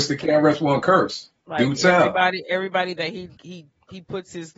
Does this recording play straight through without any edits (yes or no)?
no